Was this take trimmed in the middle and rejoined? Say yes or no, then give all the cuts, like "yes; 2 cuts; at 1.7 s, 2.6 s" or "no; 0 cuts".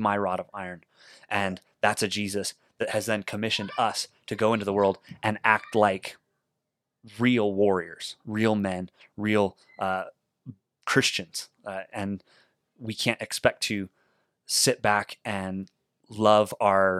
no; 0 cuts